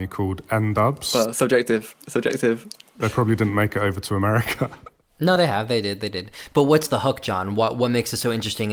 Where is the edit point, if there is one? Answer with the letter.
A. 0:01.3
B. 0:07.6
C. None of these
C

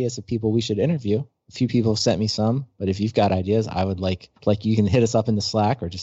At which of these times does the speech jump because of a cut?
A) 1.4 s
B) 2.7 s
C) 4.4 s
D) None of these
C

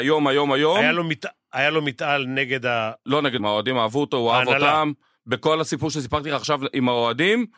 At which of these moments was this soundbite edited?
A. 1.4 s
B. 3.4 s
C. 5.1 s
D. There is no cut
B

